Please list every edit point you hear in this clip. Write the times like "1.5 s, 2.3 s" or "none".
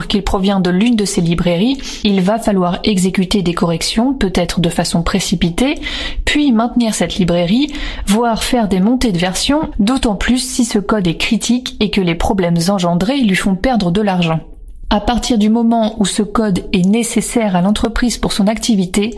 9.7 s